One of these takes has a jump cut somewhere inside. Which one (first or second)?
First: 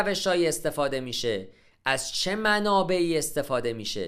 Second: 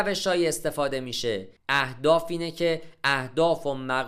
second